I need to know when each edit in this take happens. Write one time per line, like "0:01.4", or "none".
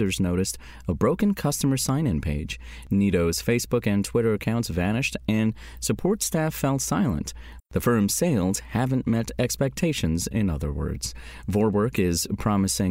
0:07.6